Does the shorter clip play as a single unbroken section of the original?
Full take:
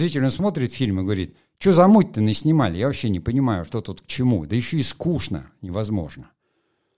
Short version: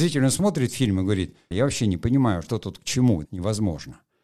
no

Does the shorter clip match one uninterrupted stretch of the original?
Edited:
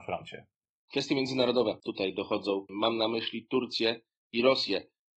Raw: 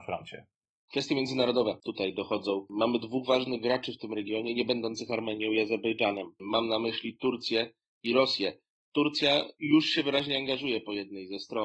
no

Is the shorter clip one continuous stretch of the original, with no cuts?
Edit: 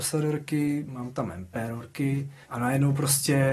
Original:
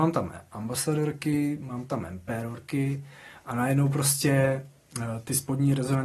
no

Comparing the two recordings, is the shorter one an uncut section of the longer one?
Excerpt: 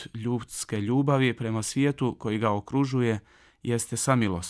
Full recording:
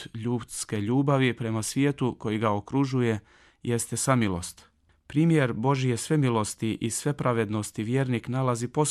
yes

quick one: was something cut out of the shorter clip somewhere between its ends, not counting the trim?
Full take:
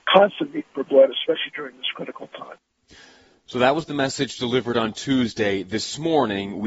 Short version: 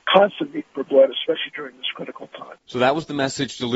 yes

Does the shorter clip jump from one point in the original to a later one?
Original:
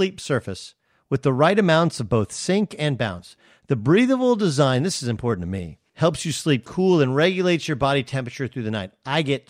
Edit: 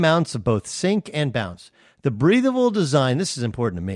no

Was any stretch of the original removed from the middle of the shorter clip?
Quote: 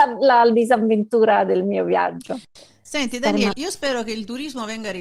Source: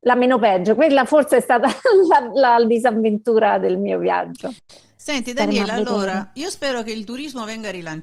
yes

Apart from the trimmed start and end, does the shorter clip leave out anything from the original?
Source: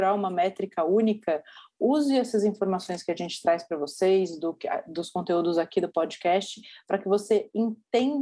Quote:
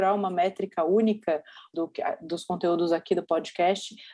yes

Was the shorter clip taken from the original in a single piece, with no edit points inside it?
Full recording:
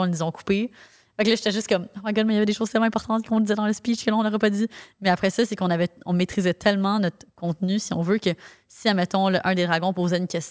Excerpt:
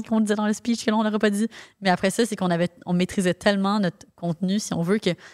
yes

